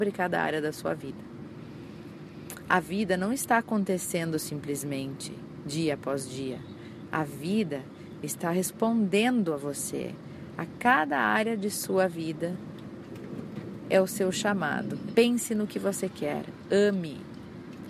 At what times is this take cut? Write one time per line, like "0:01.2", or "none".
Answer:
0:15.1